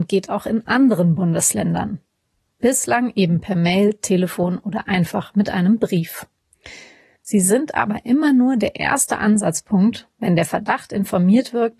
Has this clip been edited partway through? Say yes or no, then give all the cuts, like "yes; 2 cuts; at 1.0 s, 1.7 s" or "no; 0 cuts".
yes; 1 cut; at 7.2 s